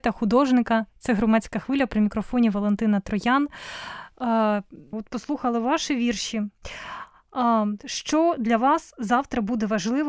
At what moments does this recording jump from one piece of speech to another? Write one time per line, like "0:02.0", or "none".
0:04.9